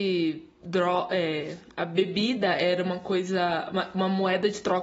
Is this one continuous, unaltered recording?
yes; 0 cuts

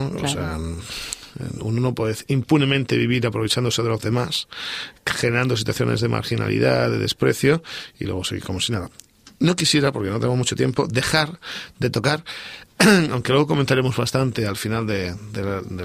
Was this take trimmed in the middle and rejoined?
no; 0 cuts

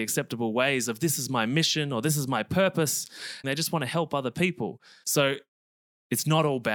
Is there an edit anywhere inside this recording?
yes; 2 cuts; at 3.4 s, 5.0 s

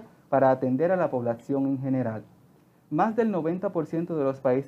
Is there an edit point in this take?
no; 0 cuts

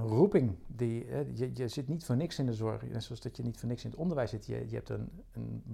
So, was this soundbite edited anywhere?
no; 0 cuts

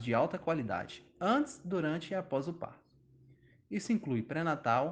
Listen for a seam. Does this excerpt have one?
no; 0 cuts

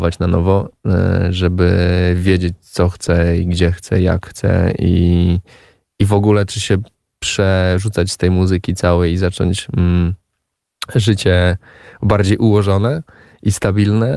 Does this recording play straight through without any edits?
yes; 0 cuts

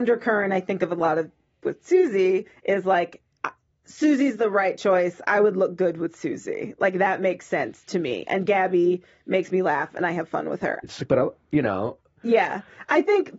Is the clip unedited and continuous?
no; 1 cut; at 10.8 s

